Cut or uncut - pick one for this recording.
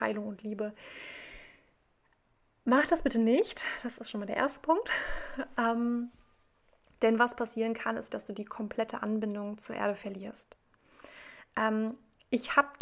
cut